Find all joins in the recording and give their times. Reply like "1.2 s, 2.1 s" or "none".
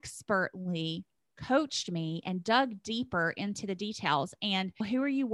none